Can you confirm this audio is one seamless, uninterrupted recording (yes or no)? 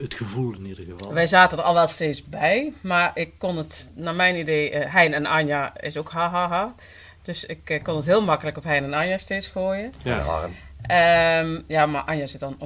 yes